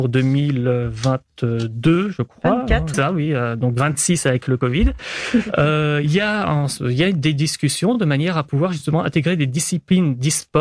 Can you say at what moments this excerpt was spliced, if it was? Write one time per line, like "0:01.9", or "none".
0:02.9